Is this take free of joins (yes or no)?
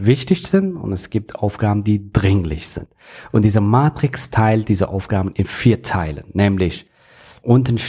yes